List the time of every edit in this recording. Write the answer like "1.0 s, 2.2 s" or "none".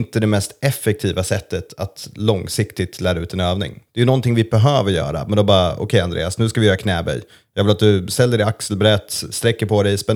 none